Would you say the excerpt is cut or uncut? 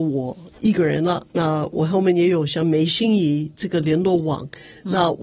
cut